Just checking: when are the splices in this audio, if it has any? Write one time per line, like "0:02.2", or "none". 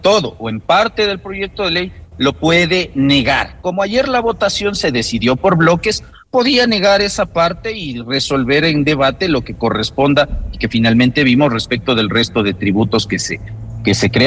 none